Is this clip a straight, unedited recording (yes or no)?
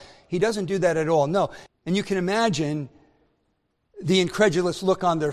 no